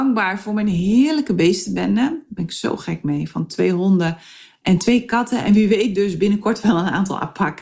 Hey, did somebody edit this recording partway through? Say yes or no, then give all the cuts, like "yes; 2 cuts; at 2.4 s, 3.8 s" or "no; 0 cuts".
no; 0 cuts